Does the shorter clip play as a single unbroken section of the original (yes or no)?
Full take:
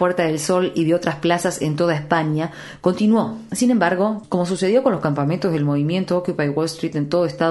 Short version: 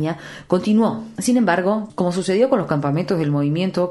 yes